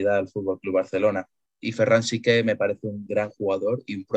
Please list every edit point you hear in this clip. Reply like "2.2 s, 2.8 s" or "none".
3.1 s